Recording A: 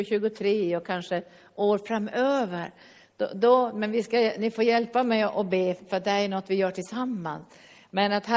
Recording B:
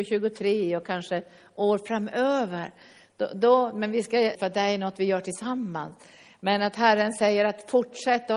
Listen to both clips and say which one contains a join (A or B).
B